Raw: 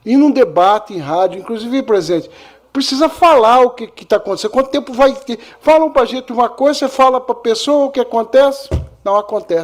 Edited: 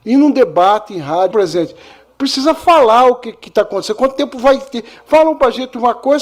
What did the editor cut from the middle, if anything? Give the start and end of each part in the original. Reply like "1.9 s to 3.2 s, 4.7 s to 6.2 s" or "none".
1.3 s to 1.8 s